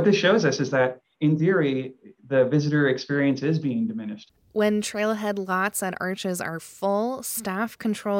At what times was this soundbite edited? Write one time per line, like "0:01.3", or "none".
none